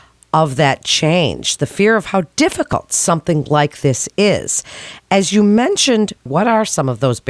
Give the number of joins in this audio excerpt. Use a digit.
1